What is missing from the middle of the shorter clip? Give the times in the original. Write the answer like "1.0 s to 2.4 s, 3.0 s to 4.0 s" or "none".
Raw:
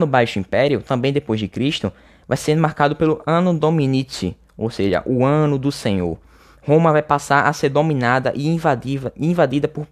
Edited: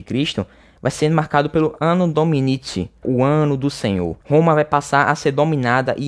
4.5 s to 5.0 s, 6.2 s to 6.6 s